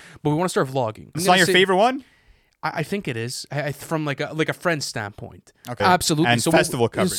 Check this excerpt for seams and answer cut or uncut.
cut